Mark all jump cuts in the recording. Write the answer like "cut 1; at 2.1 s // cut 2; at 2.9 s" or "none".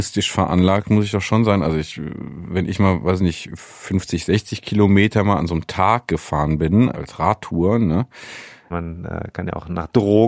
cut 1; at 6.9 s // cut 2; at 8.7 s

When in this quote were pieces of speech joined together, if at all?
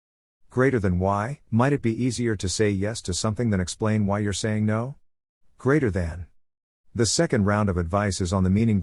cut 1; at 1.5 s // cut 2; at 6.8 s

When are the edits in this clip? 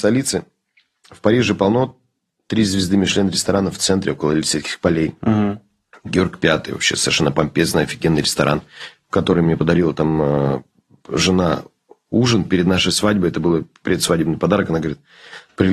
none

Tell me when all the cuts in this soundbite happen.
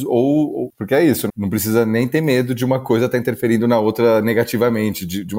cut 1; at 1.3 s

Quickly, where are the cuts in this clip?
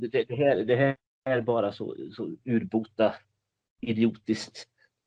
none

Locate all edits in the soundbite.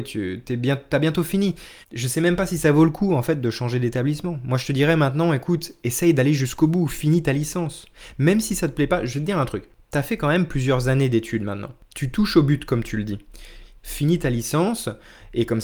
cut 1; at 1.8 s // cut 2; at 13.8 s

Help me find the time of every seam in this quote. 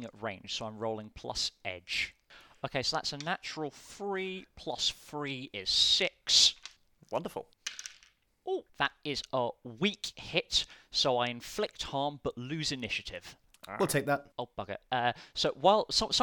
cut 1; at 8.7 s // cut 2; at 14.3 s

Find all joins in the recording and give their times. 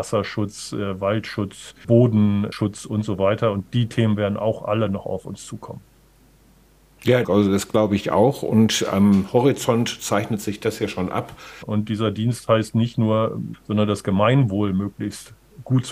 cut 1; at 11.6 s // cut 2; at 13.5 s

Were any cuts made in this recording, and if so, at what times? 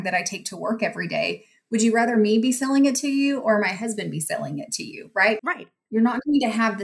cut 1; at 5.4 s

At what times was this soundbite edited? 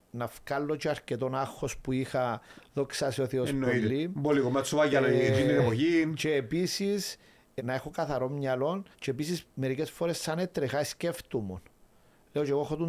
cut 1; at 7.6 s // cut 2; at 8.9 s

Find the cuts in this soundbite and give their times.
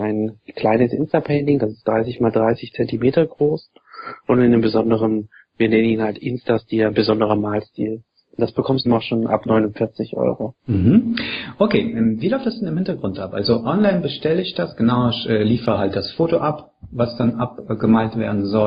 cut 1; at 8.9 s // cut 2; at 10.6 s

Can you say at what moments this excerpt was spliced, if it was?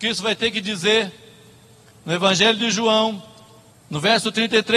cut 1; at 3.7 s

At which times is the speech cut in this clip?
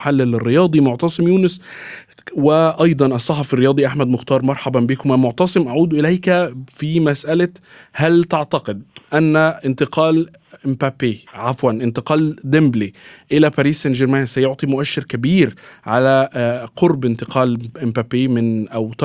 cut 1; at 11.3 s

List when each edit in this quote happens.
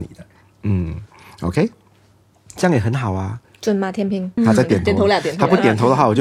cut 1; at 4.4 s

